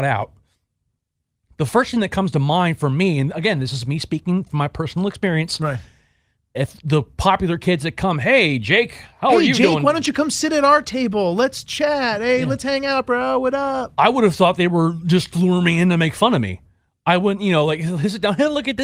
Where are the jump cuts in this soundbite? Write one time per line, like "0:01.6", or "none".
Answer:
0:06.5

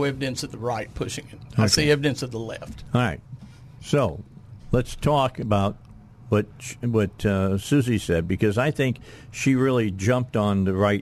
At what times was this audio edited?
none

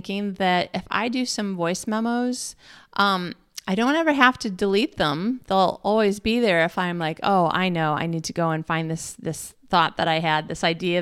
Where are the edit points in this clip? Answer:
none

